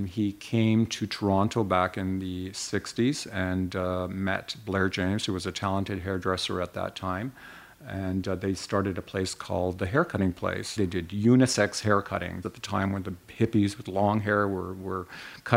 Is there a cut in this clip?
yes; 2 cuts; at 10.8 s, 12.4 s

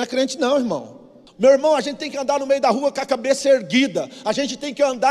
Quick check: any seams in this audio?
yes; 1 cut; at 1.3 s

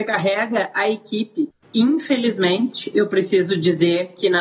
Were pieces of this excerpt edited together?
yes; 1 cut; at 1.6 s

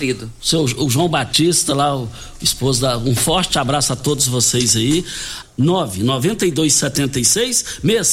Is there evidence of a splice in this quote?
yes; 1 cut; at 5.4 s

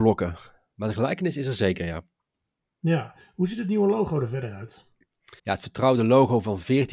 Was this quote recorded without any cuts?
no; 1 cut; at 5.4 s

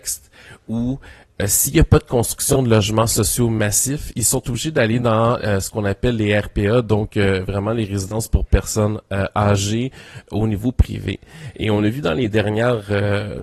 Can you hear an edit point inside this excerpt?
no; 0 cuts

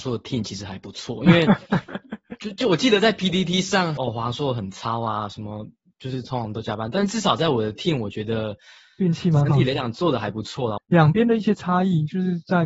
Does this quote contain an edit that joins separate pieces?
yes; 2 cuts; at 4.0 s, 10.8 s

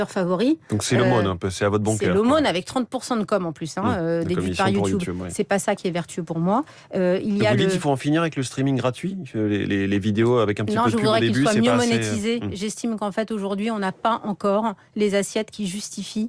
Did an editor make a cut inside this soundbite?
no; 0 cuts

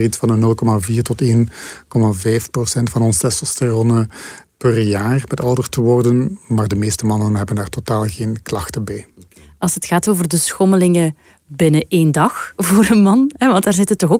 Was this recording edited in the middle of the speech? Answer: no; 0 cuts

